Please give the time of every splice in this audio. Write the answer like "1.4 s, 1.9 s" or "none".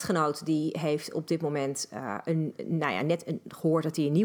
none